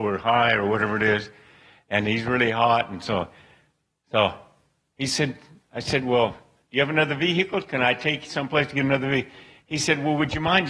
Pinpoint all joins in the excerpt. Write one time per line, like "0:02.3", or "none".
none